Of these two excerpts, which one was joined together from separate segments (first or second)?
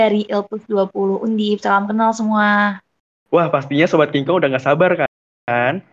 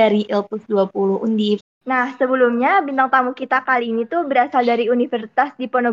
second